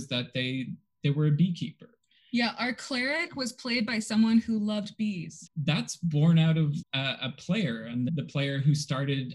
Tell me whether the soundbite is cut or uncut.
cut